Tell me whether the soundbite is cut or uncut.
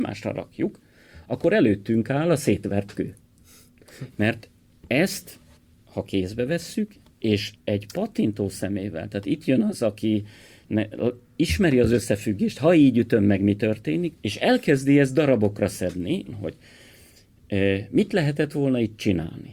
cut